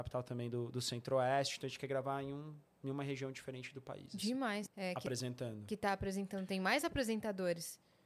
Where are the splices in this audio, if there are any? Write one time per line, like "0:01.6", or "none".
0:04.7